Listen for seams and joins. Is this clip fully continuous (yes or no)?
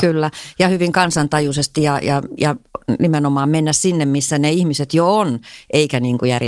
yes